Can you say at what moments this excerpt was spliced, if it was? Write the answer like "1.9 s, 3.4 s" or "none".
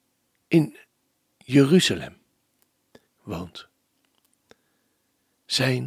3.1 s